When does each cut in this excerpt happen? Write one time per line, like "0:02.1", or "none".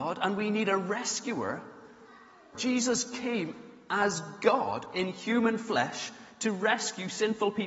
0:02.5